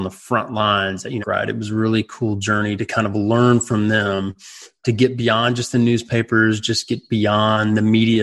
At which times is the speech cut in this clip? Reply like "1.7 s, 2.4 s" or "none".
1.2 s